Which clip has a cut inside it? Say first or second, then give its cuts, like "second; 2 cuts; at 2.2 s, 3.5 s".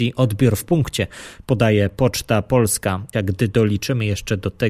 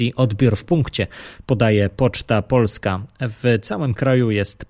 first; 1 cut; at 3.1 s